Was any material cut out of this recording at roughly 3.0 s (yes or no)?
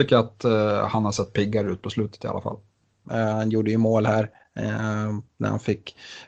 yes